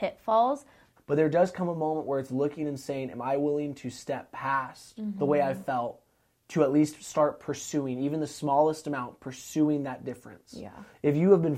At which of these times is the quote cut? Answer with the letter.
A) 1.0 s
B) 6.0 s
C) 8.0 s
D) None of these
A